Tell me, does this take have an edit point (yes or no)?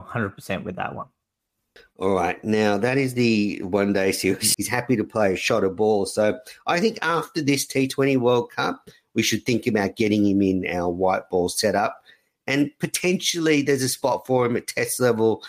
yes